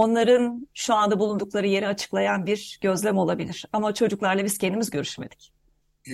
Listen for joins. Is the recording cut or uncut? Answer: uncut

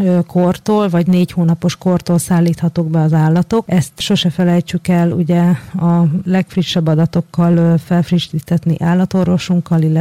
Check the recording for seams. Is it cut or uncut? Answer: cut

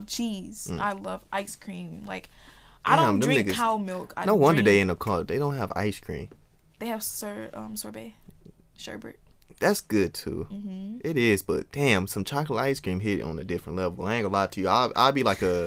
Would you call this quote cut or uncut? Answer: uncut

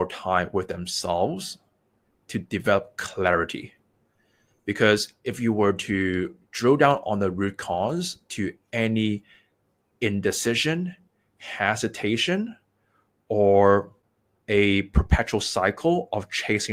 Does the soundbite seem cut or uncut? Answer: uncut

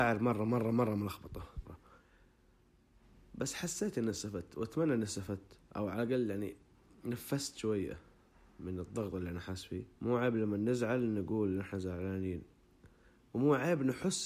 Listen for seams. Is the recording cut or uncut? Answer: cut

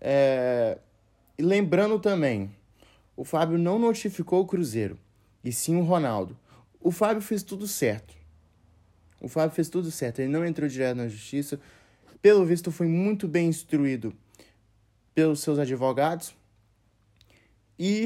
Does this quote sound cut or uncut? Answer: uncut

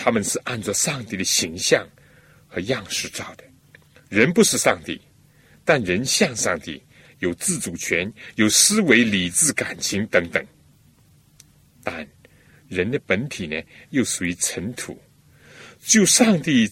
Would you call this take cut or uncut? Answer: uncut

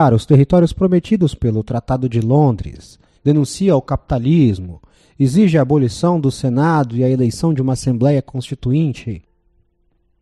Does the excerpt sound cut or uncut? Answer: cut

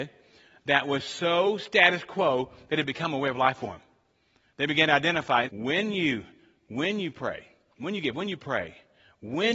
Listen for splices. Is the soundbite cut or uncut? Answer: cut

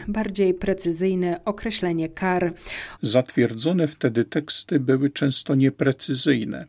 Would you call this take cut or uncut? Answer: cut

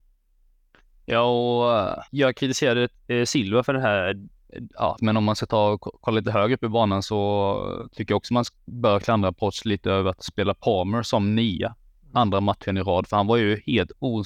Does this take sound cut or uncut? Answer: cut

